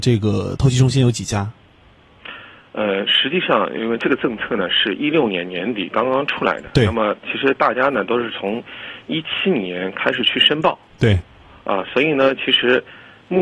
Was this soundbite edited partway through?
no; 0 cuts

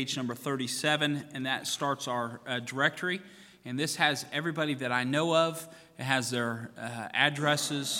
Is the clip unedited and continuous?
yes; 0 cuts

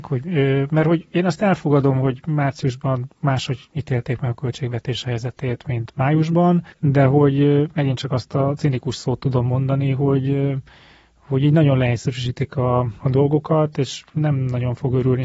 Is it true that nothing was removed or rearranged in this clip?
yes; 0 cuts

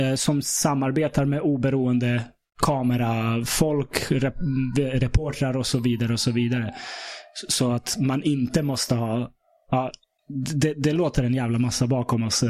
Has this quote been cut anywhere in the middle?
no; 0 cuts

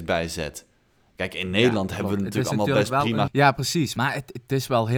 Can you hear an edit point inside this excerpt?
yes; 1 cut; at 3.3 s

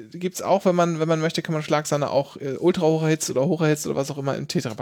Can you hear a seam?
no; 0 cuts

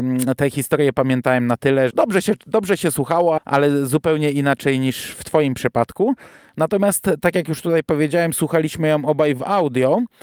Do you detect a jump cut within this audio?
yes; 2 cuts; at 1.9 s, 3.4 s

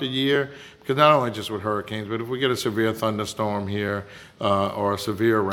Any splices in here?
no; 0 cuts

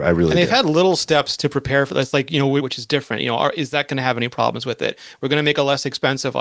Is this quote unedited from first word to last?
no; 1 cut; at 2.6 s

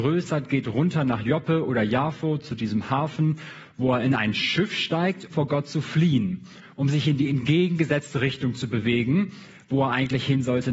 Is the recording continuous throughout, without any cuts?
no; 1 cut; at 5.3 s

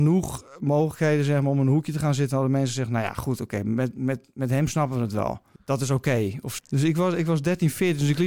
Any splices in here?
yes; 2 cuts; at 5.6 s, 6.6 s

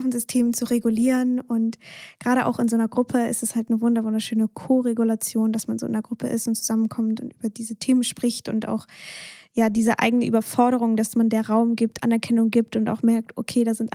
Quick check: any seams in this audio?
no; 0 cuts

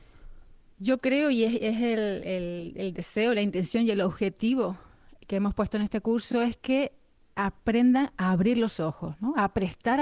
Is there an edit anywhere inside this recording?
no; 0 cuts

